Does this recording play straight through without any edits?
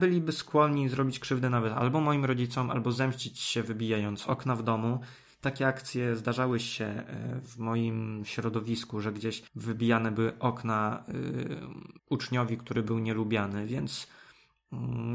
no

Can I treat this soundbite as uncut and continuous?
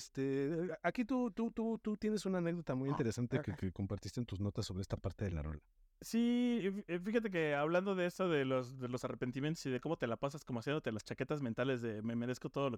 yes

